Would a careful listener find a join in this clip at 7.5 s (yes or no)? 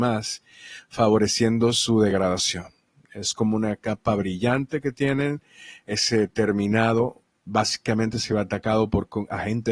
yes